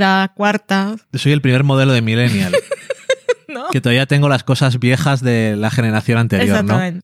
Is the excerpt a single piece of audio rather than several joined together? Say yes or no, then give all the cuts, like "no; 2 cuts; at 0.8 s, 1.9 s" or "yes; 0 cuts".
yes; 0 cuts